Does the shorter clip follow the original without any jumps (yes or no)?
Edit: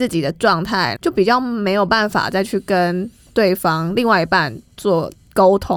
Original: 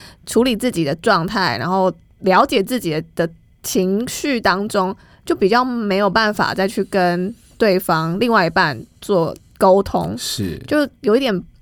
no